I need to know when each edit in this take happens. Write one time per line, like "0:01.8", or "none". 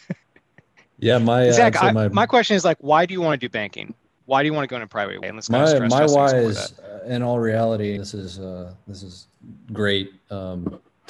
0:05.2
0:08.0